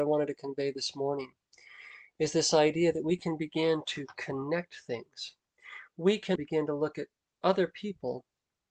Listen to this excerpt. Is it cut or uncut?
cut